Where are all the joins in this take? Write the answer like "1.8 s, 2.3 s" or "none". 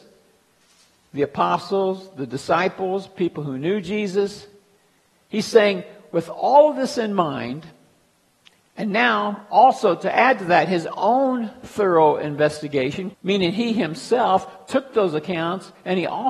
13.1 s